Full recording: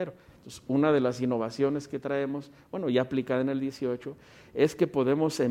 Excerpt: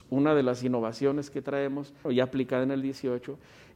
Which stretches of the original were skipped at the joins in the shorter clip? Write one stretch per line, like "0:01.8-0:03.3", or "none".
0:02.6-0:02.8